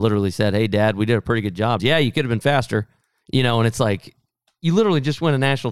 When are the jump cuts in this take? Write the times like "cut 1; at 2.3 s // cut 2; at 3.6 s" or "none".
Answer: cut 1; at 1.8 s

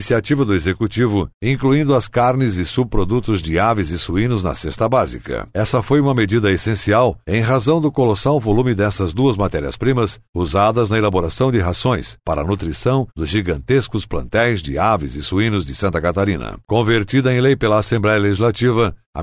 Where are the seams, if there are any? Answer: cut 1; at 5.5 s // cut 2; at 16.6 s

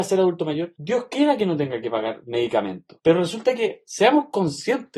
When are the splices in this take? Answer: cut 1; at 3.0 s

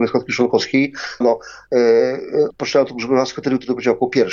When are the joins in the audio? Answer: cut 1; at 1.2 s // cut 2; at 2.5 s

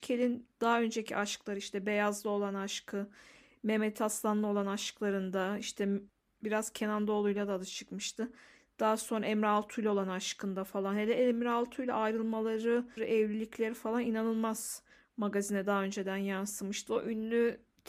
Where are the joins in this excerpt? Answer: cut 1; at 13.0 s // cut 2; at 16.9 s

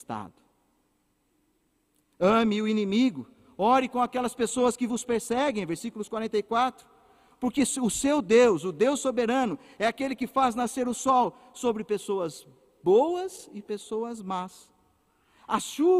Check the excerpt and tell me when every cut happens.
none

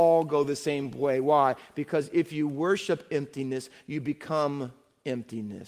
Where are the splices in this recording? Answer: none

